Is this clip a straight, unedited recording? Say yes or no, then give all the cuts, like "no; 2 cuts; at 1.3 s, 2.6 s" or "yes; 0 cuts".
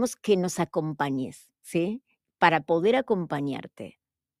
yes; 0 cuts